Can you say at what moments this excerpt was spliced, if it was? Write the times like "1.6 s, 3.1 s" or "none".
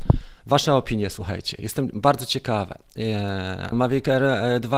3.7 s